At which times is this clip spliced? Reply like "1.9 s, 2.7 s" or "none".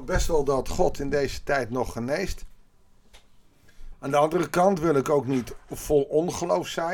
3.9 s